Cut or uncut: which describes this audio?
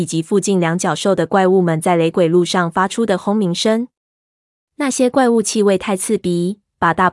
uncut